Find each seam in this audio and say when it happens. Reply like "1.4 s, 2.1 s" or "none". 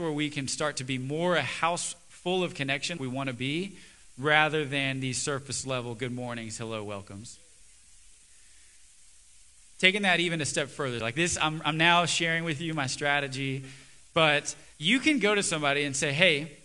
3.0 s, 11.0 s, 14.7 s